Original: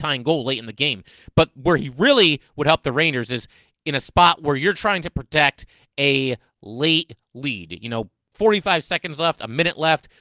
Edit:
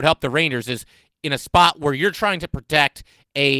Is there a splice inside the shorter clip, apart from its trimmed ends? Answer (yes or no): no